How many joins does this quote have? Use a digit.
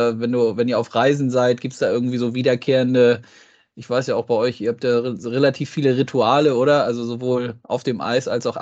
0